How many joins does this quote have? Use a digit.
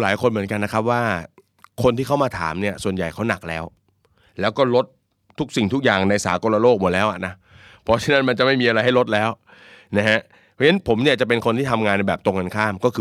0